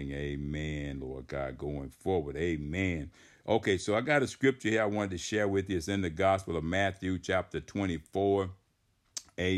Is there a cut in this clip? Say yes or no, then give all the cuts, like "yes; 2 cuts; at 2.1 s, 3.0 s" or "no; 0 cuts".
no; 0 cuts